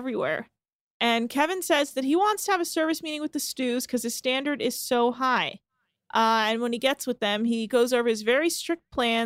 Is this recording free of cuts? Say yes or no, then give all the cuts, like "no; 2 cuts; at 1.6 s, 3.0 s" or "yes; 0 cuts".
yes; 0 cuts